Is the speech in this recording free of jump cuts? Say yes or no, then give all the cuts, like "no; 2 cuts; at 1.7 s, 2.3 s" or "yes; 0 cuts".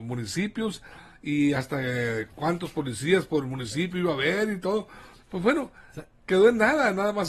yes; 0 cuts